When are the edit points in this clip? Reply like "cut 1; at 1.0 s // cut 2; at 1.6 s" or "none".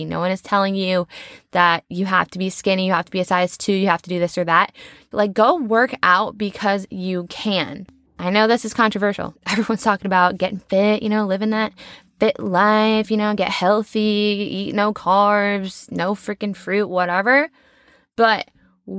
cut 1; at 5.1 s // cut 2; at 8.1 s // cut 3; at 9.4 s